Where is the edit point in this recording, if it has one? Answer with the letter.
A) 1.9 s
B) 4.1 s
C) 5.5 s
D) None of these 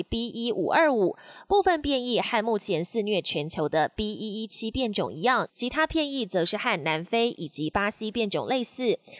C